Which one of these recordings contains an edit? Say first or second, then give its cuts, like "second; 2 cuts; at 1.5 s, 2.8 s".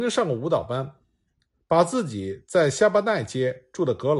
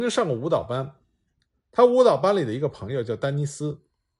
first; 1 cut; at 1.6 s